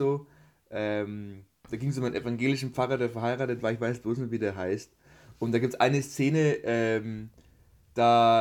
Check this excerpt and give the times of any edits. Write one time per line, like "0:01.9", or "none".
none